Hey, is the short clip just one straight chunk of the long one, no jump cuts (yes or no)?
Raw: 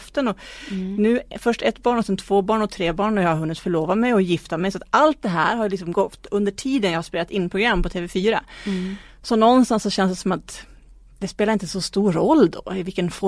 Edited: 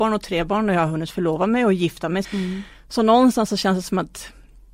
no